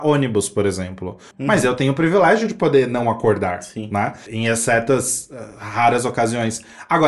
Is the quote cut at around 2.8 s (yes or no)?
no